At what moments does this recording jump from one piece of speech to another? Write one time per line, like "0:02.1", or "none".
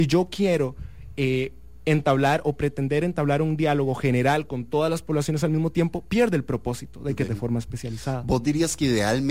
0:07.3